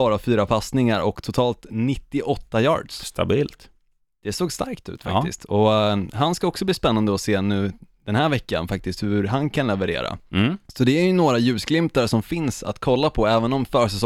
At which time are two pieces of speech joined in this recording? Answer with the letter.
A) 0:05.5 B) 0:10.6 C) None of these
B